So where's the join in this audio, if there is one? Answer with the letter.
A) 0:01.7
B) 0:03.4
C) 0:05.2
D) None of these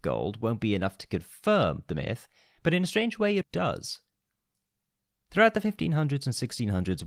B